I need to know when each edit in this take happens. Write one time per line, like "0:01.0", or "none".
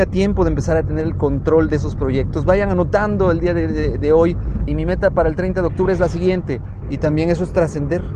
0:04.7
0:06.8